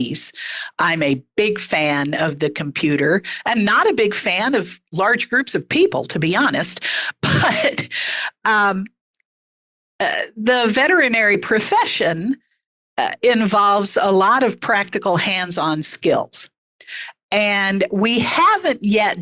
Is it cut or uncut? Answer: uncut